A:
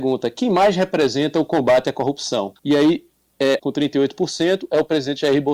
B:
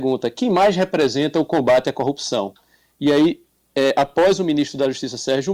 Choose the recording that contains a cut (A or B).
A